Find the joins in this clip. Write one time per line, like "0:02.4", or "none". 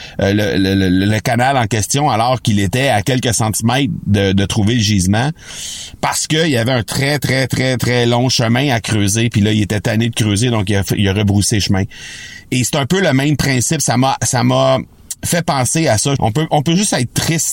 0:16.2